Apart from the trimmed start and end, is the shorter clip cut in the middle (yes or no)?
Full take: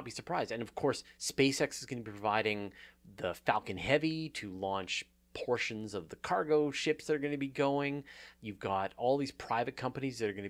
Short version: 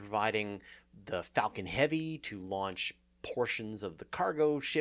no